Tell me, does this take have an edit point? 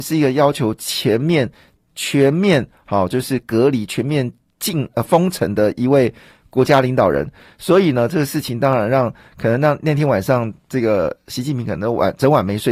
no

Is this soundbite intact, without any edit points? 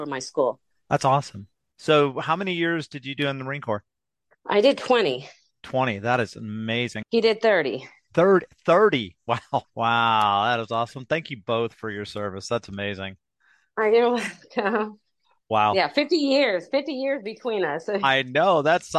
no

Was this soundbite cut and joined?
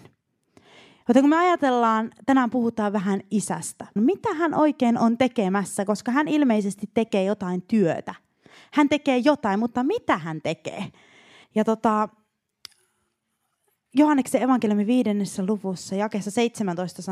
yes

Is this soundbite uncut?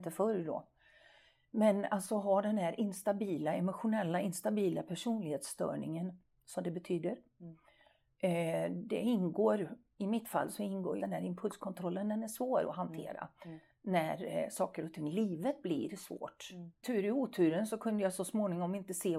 no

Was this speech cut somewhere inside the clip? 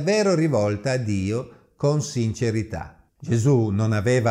yes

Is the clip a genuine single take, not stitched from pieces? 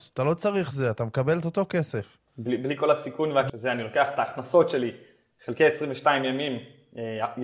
no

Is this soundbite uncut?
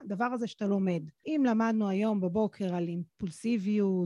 no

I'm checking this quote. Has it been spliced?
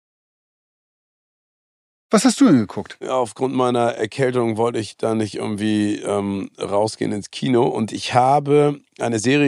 yes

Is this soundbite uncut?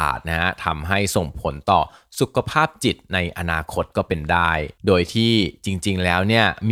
no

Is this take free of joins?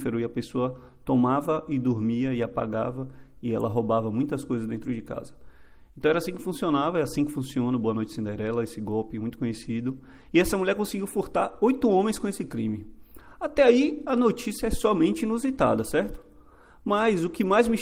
yes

